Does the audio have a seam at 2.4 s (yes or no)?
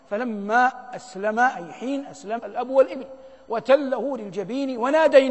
yes